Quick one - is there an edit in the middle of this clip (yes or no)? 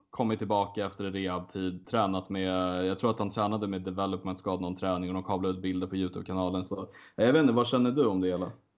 yes